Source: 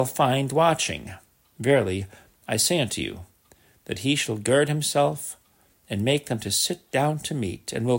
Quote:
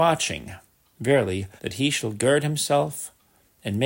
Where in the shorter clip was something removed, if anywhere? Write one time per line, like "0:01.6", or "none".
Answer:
0:01.6